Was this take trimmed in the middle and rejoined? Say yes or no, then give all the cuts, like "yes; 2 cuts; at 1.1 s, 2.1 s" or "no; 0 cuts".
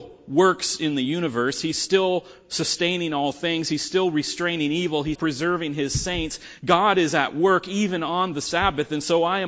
yes; 1 cut; at 5.2 s